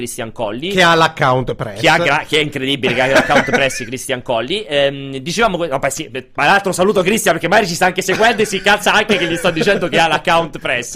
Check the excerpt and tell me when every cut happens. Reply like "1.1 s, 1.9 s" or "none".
none